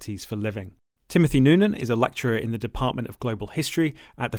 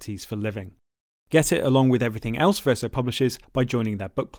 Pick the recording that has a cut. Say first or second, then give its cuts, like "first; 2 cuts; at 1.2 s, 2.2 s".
first; 1 cut; at 1.0 s